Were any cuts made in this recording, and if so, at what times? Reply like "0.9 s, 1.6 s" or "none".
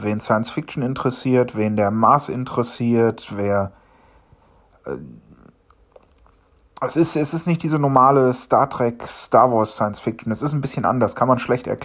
none